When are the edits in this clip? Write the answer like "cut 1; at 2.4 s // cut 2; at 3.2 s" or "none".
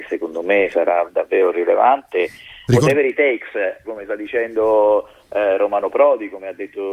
cut 1; at 2.7 s // cut 2; at 3.8 s